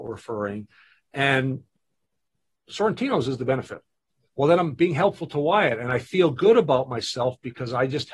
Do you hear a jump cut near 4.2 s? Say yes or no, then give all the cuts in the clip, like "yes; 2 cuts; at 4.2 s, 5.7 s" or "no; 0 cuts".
yes; 1 cut; at 4.2 s